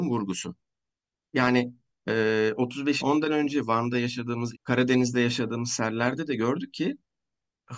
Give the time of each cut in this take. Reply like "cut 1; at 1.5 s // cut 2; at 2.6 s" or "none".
cut 1; at 3.0 s // cut 2; at 4.5 s